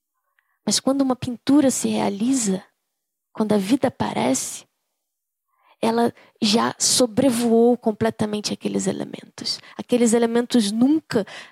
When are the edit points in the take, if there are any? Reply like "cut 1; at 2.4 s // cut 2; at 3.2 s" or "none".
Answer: none